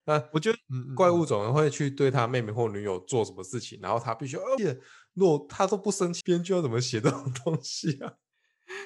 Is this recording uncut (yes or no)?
no